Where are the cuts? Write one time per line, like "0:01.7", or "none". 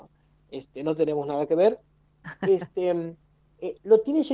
none